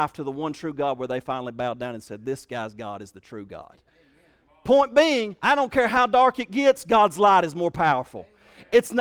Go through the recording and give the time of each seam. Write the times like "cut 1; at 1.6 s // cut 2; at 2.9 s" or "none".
none